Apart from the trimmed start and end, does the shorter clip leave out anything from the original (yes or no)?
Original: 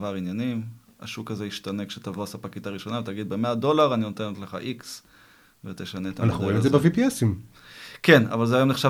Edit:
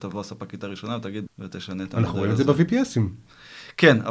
yes